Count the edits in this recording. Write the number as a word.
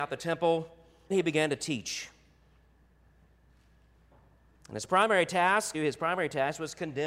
two